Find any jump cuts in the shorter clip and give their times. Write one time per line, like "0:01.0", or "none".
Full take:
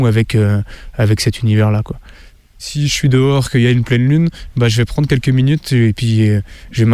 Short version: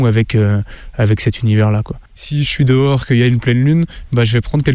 0:02.1